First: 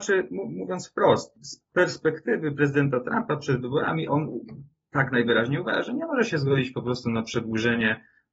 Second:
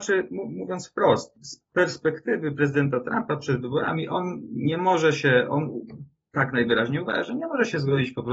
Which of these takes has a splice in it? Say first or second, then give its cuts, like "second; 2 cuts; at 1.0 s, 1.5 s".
first; 1 cut; at 4.1 s